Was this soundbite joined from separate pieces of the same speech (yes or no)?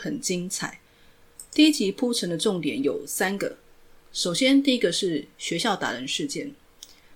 no